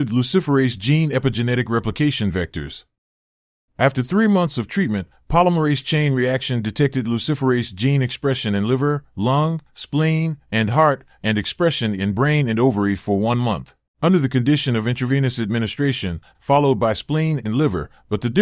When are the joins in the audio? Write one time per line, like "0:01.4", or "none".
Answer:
0:13.9
0:16.3